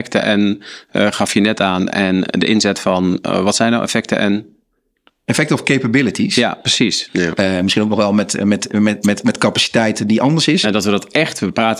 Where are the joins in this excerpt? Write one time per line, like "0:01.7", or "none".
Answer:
0:07.1
0:10.6